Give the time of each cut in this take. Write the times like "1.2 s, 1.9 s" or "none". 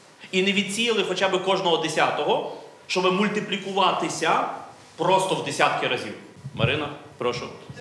none